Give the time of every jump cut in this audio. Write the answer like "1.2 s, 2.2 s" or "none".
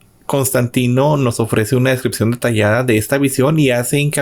none